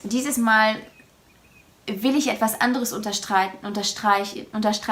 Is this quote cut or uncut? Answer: uncut